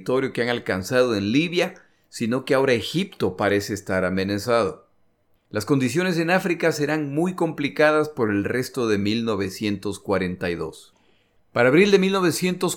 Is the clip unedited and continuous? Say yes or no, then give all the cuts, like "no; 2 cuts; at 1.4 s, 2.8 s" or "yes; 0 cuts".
no; 1 cut; at 11.4 s